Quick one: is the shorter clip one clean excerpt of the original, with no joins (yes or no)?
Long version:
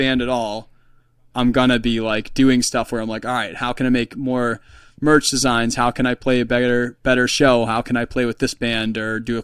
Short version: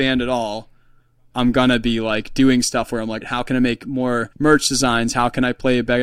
no